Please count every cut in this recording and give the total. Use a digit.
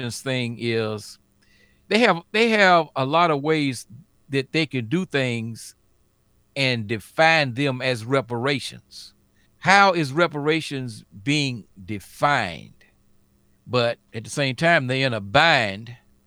2